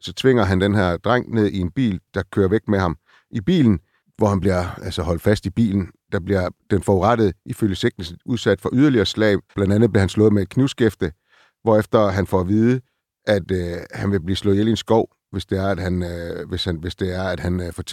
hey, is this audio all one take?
no; 2 cuts; at 2.1 s, 9.5 s

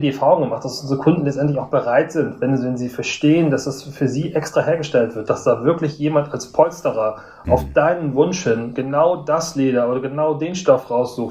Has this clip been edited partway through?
no; 0 cuts

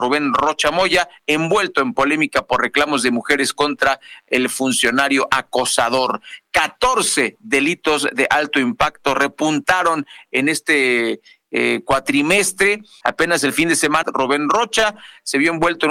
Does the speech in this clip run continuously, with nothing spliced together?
no; 2 cuts; at 13.0 s, 14.0 s

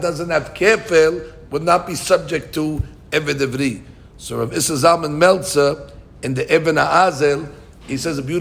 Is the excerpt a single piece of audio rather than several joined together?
yes; 0 cuts

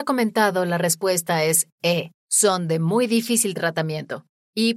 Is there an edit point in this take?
yes; 1 cut; at 2.2 s

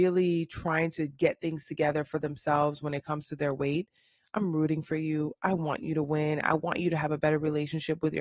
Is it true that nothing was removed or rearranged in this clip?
yes; 0 cuts

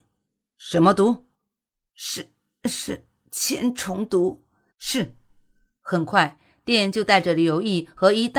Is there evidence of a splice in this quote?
yes; 1 cut; at 4.7 s

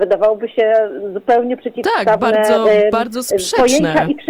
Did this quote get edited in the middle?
no; 0 cuts

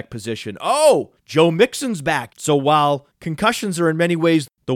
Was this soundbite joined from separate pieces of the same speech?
yes; 1 cut; at 2.3 s

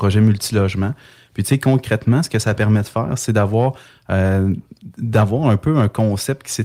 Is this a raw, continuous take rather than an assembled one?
yes; 0 cuts

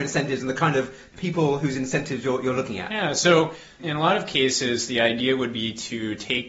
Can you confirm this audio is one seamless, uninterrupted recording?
no; 1 cut; at 3.8 s

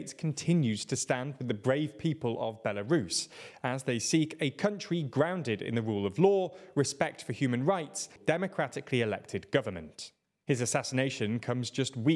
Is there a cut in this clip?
yes; 2 cuts; at 8.2 s, 10.4 s

